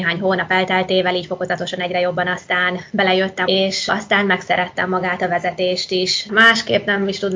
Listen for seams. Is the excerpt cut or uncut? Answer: cut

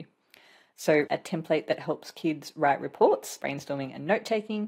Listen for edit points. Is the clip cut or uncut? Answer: cut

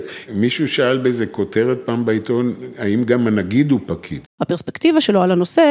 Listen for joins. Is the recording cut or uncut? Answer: cut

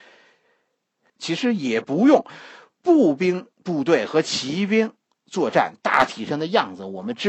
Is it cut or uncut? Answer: cut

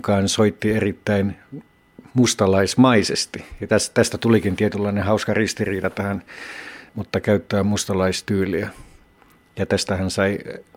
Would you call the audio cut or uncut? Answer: cut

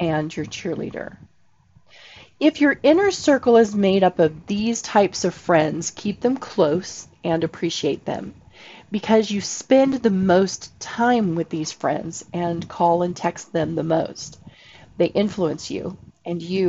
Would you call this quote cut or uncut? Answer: uncut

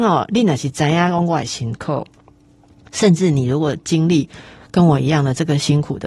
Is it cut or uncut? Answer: uncut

